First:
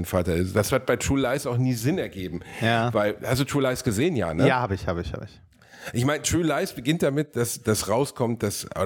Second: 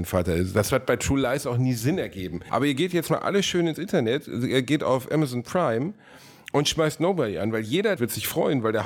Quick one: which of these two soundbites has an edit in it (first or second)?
second